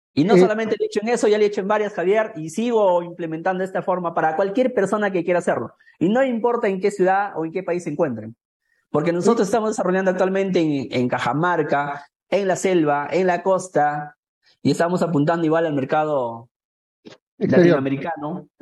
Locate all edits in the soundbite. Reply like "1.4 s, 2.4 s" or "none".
none